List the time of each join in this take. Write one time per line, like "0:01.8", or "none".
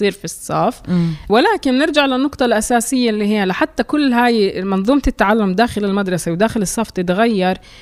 0:01.3